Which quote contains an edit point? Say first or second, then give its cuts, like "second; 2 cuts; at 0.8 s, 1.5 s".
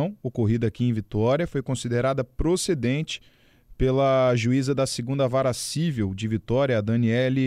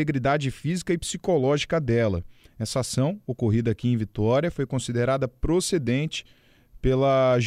second; 1 cut; at 2.5 s